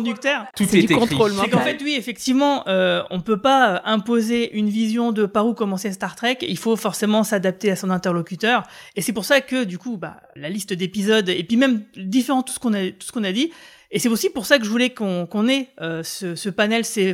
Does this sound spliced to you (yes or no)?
no